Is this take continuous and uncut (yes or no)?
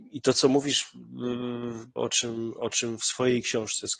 no